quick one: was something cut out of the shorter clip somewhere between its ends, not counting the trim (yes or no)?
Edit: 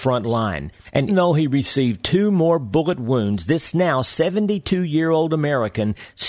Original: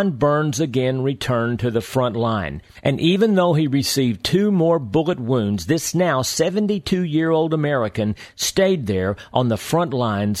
yes